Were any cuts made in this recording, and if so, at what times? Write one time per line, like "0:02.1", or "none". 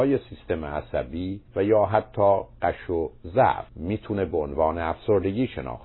0:01.5
0:03.7